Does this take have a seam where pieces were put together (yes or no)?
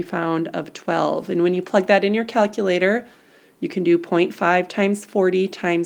no